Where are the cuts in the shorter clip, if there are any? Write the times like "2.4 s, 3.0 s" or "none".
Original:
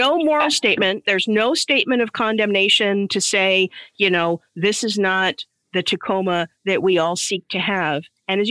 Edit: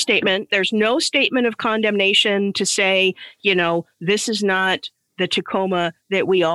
none